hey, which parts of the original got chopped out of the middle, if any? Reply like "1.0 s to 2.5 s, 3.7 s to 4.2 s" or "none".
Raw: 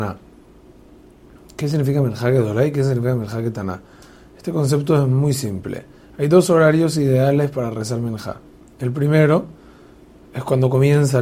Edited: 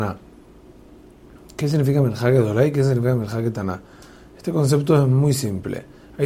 none